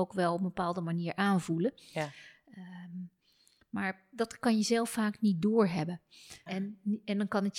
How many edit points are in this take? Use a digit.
1